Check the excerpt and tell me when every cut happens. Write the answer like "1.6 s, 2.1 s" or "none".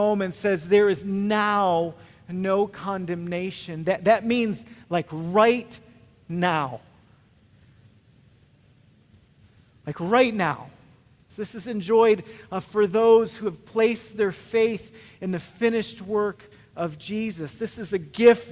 11.3 s

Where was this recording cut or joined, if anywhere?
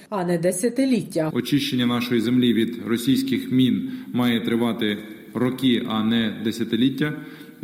1.3 s

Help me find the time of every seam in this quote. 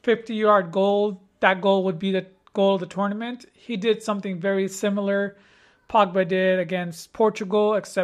none

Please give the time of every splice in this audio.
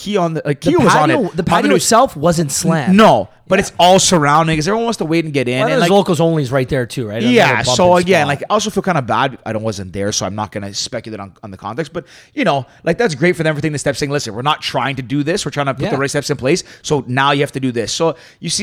9.4 s

